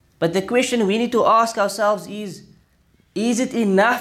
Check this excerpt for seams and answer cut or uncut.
uncut